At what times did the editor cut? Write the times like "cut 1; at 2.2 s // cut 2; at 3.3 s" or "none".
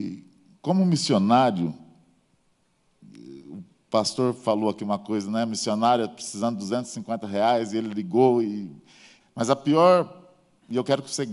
cut 1; at 9.2 s